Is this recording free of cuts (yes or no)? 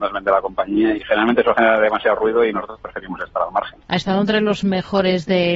no